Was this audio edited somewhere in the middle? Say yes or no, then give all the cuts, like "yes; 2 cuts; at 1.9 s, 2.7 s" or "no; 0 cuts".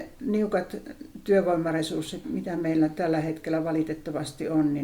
yes; 1 cut; at 2.2 s